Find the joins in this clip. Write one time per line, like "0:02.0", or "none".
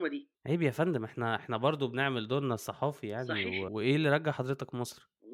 0:03.7